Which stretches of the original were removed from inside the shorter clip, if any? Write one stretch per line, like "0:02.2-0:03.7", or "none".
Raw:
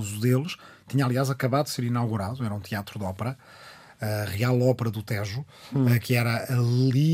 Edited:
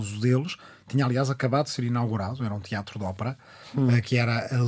0:03.6-0:05.6